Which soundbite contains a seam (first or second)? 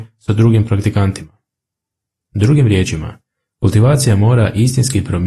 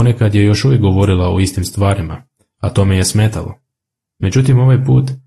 first